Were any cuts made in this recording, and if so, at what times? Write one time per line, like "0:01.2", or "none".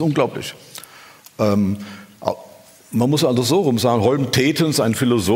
none